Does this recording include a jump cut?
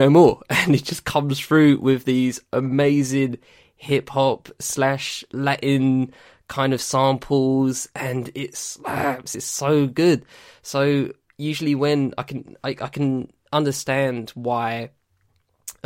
no; 0 cuts

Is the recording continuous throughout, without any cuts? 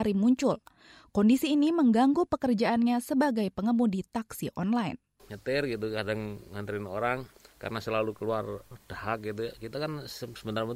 yes; 0 cuts

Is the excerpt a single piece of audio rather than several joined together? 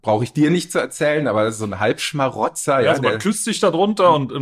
yes; 0 cuts

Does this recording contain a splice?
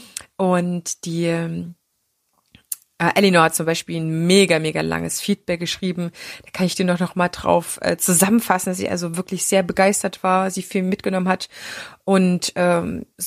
no; 0 cuts

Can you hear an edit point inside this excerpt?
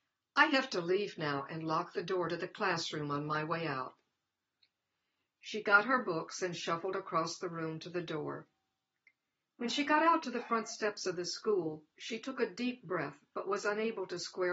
yes; 1 cut; at 5.3 s

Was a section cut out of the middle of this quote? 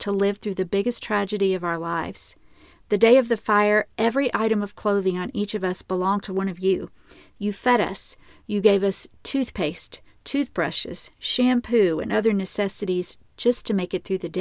no; 0 cuts

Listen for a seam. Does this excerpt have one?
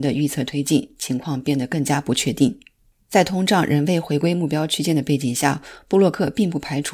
no; 0 cuts

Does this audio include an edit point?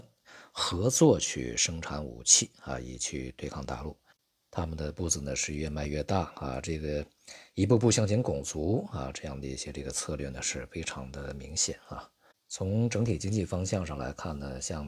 no; 0 cuts

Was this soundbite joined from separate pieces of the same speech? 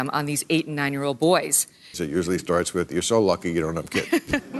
yes; 1 cut; at 1.9 s

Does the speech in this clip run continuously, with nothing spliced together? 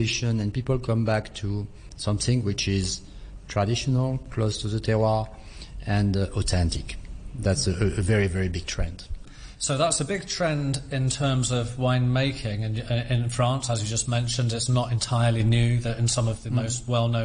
yes; 0 cuts

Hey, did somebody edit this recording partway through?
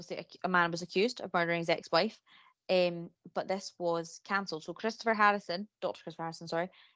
no; 0 cuts

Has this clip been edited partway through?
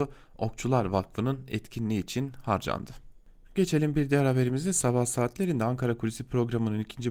no; 0 cuts

